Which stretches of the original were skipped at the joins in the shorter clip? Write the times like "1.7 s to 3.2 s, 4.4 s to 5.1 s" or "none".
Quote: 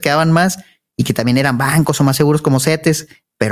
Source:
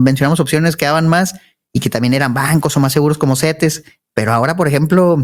none